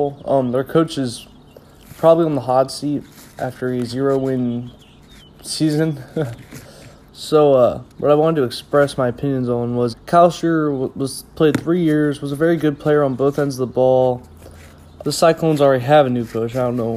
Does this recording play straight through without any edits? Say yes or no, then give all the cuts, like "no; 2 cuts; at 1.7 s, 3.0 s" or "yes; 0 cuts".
no; 3 cuts; at 7.0 s, 9.9 s, 15.0 s